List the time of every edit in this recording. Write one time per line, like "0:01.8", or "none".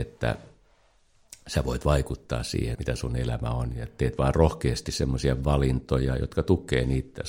0:02.7

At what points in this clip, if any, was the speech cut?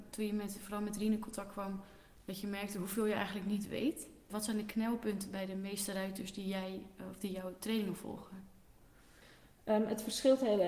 none

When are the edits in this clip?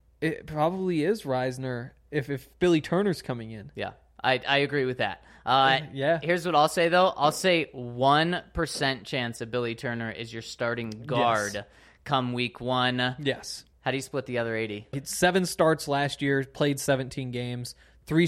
0:13.7
0:14.9

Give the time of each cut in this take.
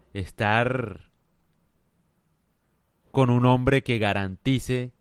none

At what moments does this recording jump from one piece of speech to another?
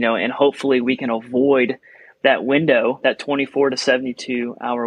none

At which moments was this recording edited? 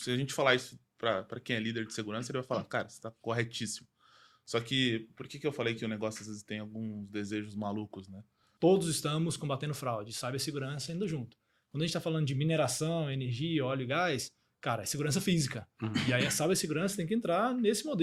0:08.6

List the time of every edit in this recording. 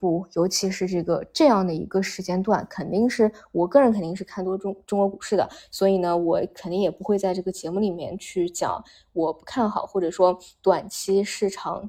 none

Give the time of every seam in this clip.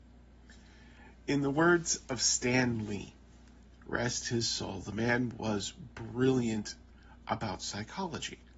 none

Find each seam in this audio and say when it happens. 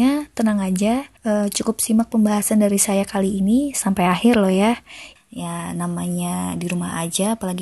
0:01.2
0:05.2

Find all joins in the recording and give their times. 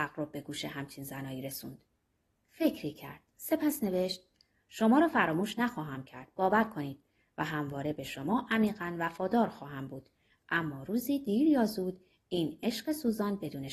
none

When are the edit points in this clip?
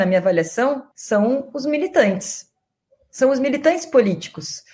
0:00.9

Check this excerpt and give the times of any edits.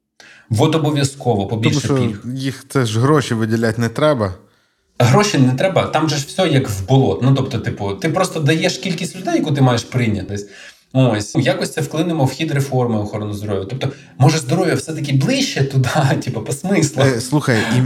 0:10.3
0:11.3

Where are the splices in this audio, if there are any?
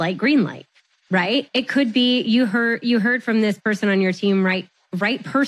none

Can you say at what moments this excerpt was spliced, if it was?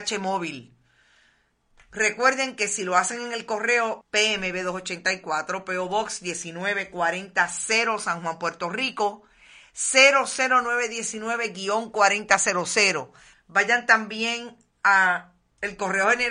0:04.0
0:13.3

